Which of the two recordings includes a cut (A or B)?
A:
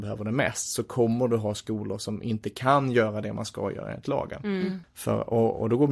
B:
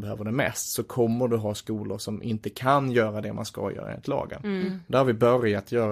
A